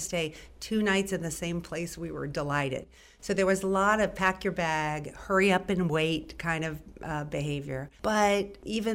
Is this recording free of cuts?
no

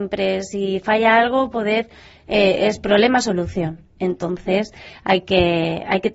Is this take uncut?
yes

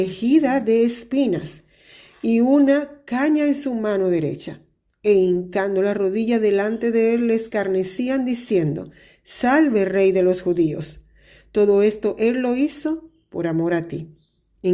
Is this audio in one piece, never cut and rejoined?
yes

